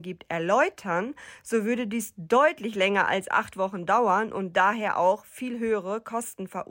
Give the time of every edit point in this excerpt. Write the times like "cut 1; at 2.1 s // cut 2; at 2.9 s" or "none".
none